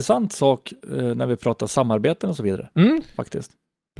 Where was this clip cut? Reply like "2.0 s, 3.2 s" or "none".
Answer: none